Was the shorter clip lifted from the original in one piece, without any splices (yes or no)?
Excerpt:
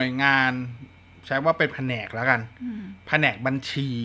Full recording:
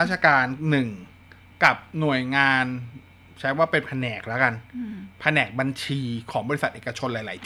yes